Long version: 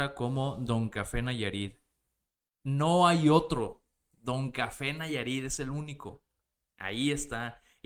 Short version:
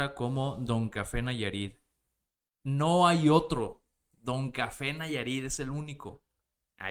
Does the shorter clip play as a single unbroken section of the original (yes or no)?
yes